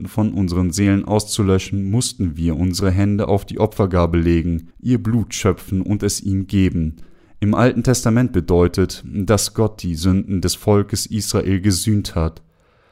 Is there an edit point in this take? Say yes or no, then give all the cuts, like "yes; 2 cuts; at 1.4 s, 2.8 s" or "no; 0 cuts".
yes; 1 cut; at 4.7 s